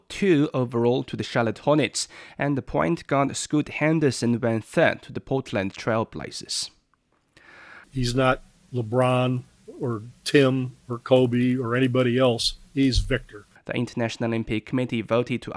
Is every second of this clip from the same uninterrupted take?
no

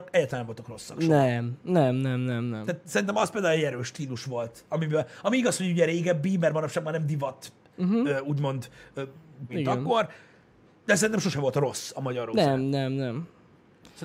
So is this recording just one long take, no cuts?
no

